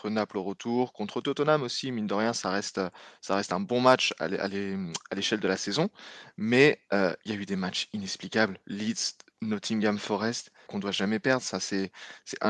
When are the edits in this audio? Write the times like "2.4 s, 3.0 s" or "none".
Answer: 10.7 s